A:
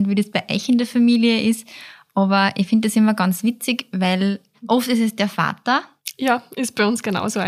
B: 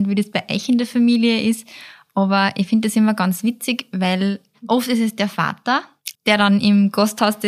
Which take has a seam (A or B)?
B